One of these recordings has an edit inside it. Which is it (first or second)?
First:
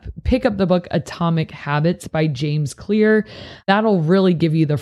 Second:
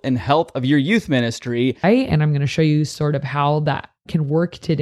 second